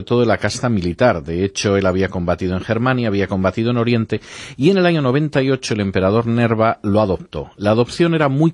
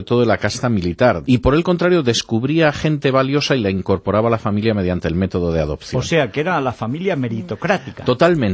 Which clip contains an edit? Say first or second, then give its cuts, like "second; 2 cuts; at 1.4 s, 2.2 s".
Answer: second; 1 cut; at 1.2 s